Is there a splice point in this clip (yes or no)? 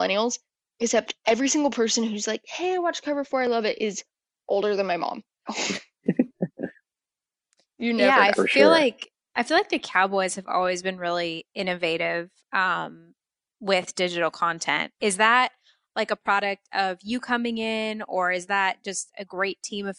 yes